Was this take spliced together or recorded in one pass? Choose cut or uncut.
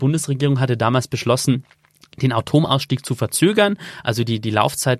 uncut